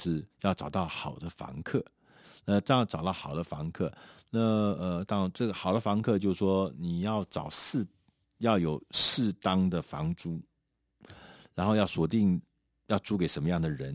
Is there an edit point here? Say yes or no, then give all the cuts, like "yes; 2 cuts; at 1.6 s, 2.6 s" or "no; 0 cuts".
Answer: no; 0 cuts